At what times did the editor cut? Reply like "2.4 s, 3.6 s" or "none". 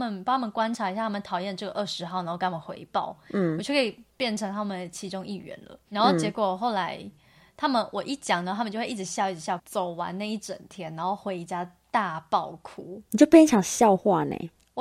9.6 s